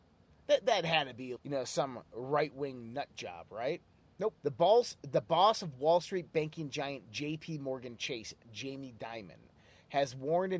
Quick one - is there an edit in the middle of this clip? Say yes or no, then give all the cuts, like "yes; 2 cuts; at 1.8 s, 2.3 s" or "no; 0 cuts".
yes; 2 cuts; at 1.4 s, 4.4 s